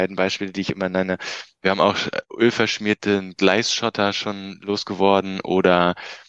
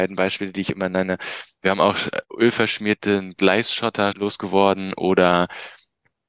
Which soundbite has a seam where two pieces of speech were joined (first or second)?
second